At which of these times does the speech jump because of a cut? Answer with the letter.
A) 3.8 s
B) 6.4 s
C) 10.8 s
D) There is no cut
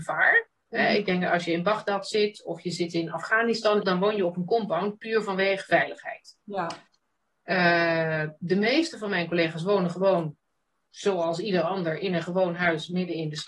A